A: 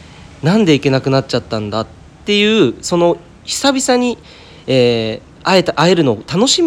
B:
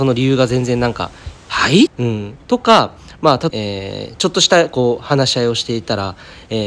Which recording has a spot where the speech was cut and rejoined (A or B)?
B